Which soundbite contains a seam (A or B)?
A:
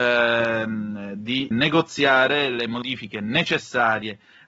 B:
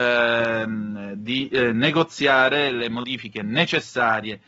A